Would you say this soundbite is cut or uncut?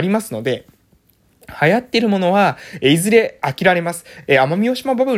uncut